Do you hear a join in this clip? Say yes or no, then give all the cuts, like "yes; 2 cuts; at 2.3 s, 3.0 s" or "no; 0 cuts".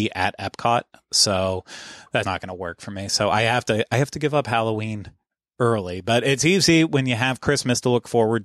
yes; 1 cut; at 2.2 s